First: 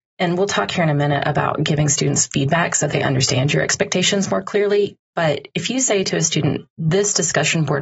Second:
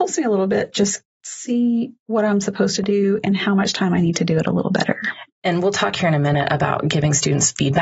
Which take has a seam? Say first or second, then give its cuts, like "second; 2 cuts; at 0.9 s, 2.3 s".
second; 1 cut; at 5.3 s